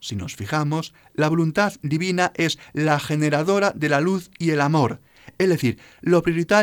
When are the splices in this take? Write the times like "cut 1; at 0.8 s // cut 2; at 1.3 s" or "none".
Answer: none